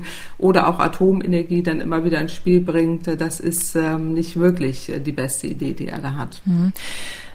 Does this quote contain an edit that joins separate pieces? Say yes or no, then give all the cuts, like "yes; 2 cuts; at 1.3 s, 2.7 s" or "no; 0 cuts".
no; 0 cuts